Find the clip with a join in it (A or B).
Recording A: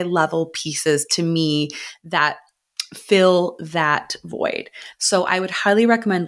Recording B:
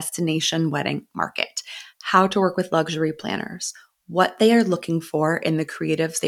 A